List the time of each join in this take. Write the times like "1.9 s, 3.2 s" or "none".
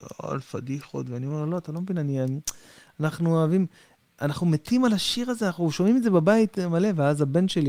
none